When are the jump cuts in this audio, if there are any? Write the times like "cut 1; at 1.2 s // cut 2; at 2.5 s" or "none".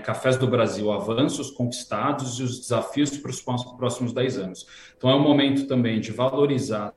none

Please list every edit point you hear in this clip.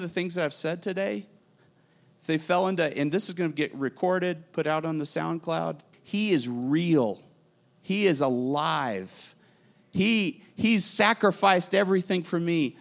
cut 1; at 5.9 s

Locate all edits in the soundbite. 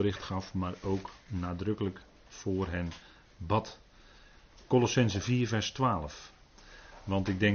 none

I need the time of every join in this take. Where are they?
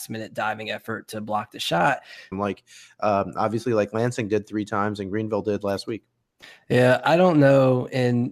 cut 1; at 2.3 s

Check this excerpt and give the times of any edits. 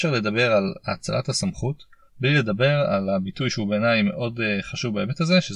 cut 1; at 2.1 s

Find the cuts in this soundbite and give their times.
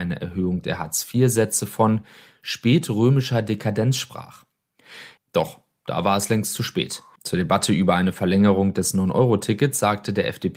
cut 1; at 5.2 s // cut 2; at 7.2 s

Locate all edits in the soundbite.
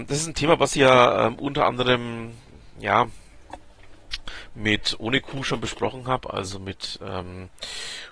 none

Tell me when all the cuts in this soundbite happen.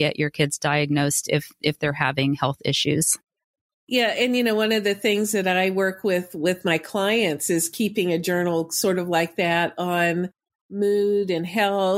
none

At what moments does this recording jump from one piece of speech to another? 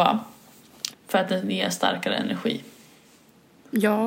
cut 1; at 0.9 s

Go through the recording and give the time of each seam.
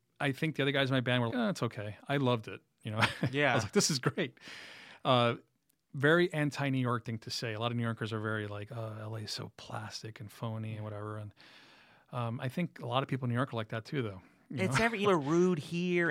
cut 1; at 1.3 s // cut 2; at 15.0 s

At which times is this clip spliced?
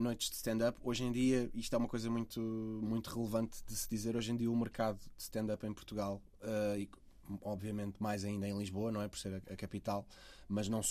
none

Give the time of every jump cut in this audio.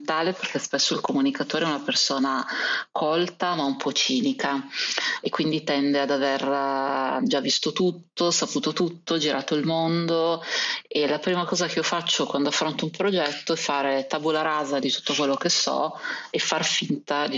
none

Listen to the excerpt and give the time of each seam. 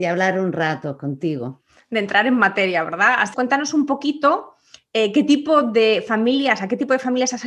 cut 1; at 3.3 s

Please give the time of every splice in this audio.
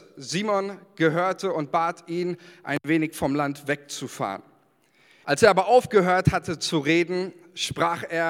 cut 1; at 5.2 s

